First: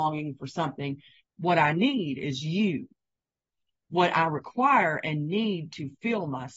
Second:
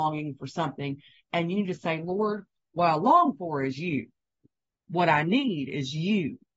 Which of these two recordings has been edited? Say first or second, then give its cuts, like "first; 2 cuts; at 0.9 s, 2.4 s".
first; 1 cut; at 1.2 s